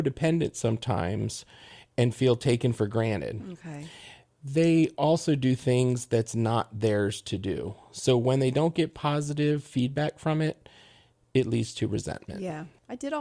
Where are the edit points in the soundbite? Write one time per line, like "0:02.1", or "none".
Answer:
none